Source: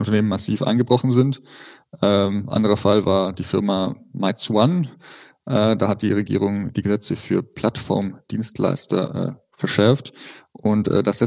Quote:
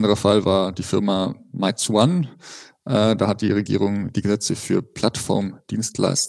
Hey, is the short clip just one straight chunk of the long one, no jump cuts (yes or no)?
yes